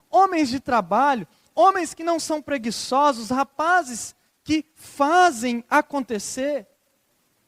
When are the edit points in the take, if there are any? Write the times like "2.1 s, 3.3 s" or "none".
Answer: none